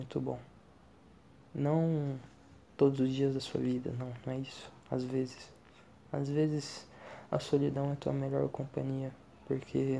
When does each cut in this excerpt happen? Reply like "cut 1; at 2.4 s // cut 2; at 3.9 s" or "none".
none